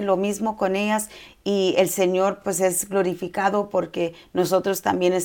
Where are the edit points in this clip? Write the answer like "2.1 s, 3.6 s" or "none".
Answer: none